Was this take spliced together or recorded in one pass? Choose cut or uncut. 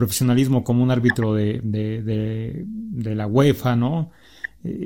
uncut